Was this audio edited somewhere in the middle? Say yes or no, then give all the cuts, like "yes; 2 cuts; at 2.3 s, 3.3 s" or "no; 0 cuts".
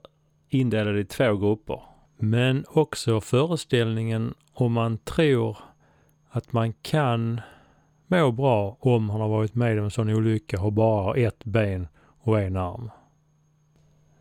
yes; 1 cut; at 2.1 s